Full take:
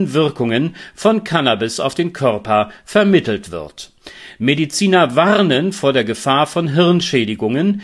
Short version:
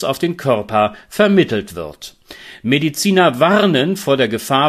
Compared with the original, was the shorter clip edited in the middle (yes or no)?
no